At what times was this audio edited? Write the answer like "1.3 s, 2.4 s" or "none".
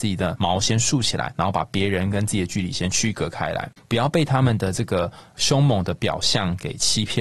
3.8 s

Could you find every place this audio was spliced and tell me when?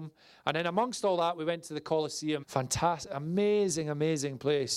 2.4 s

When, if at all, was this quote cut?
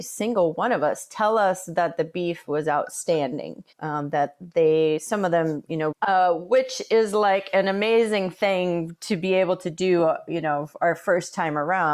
3.7 s, 5.9 s

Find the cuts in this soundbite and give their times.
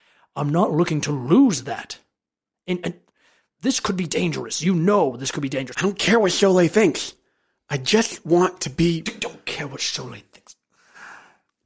5.7 s

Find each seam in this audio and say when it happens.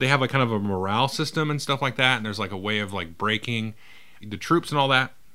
4.2 s

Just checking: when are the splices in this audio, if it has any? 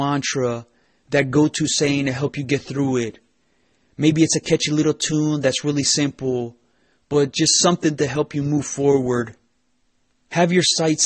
none

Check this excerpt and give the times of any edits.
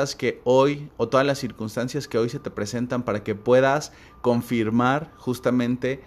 none

